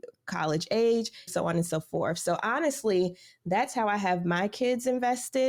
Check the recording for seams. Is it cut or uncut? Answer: cut